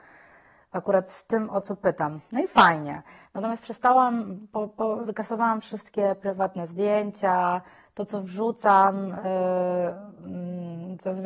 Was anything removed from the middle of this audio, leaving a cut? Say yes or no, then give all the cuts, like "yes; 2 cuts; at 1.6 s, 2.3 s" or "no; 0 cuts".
no; 0 cuts